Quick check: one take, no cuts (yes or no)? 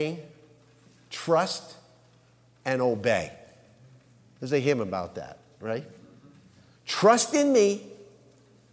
yes